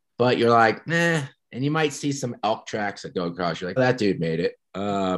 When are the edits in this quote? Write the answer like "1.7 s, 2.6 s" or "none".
3.8 s